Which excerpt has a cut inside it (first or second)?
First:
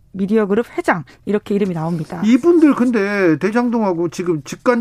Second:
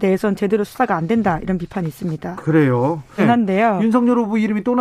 second